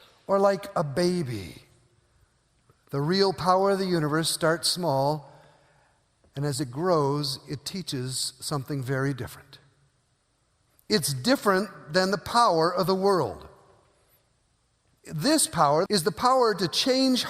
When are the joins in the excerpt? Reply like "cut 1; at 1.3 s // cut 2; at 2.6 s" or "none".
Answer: cut 1; at 15.9 s